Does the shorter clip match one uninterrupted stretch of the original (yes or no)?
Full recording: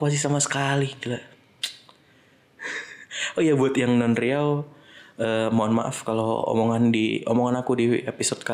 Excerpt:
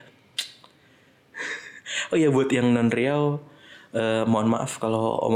yes